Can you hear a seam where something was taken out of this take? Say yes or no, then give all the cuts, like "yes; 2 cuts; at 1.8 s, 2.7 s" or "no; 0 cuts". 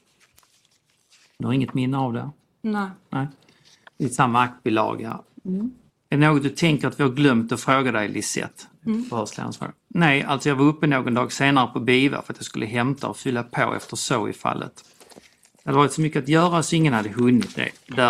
yes; 2 cuts; at 5.9 s, 9.8 s